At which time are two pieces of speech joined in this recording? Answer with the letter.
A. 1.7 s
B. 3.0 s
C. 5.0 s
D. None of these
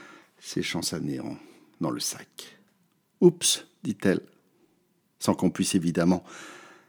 B